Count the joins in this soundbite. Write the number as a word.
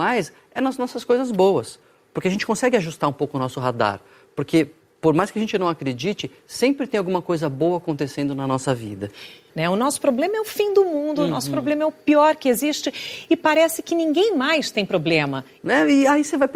two